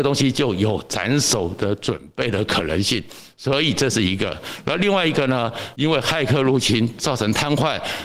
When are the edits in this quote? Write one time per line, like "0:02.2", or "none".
0:05.7